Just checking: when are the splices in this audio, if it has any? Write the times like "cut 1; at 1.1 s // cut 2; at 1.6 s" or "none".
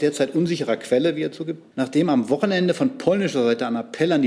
cut 1; at 1.7 s